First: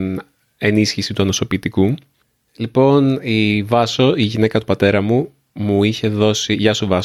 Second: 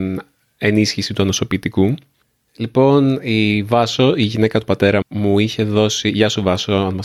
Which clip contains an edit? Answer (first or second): second